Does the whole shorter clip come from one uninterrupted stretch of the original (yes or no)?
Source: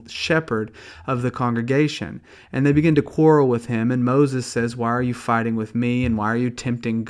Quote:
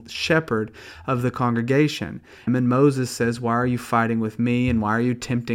no